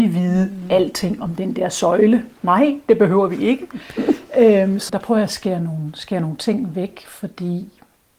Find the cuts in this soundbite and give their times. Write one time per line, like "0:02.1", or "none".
0:04.9